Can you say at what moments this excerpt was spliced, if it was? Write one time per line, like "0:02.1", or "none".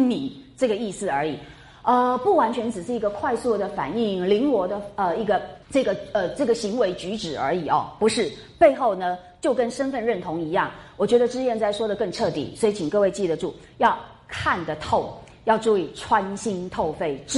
0:05.6